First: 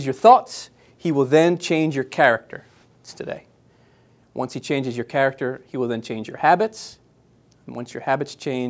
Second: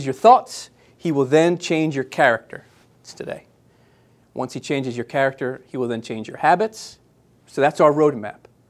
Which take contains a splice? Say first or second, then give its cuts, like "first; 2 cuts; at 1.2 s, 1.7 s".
second; 1 cut; at 7.4 s